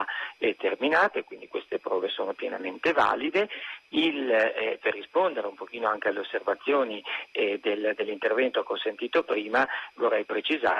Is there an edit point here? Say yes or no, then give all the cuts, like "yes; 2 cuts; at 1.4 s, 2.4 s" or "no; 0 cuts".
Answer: no; 0 cuts